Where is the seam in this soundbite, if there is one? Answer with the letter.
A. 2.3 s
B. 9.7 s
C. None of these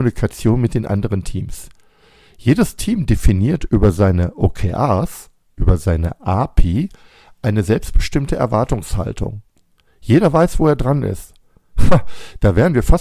C